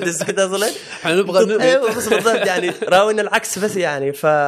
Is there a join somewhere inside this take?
yes; 1 cut; at 1.6 s

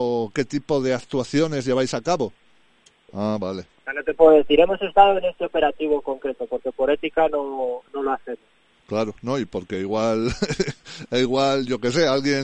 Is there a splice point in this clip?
yes; 1 cut; at 3.1 s

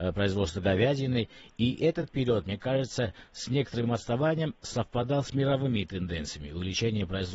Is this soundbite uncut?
yes; 0 cuts

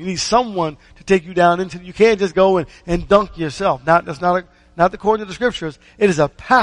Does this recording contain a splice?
no; 0 cuts

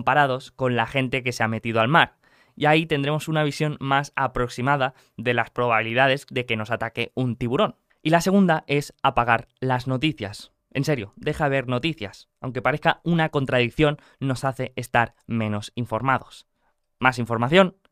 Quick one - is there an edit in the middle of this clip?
no; 0 cuts

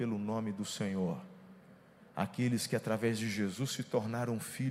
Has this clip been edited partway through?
no; 0 cuts

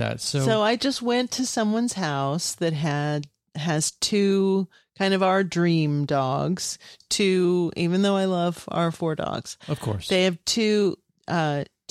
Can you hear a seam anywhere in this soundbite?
no; 0 cuts

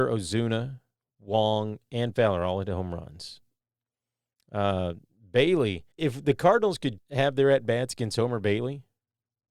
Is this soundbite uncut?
no; 2 cuts; at 5.9 s, 7.0 s

